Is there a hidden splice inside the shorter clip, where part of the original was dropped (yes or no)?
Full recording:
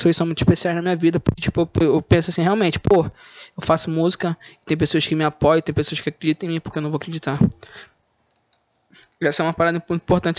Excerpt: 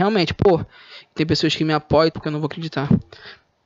yes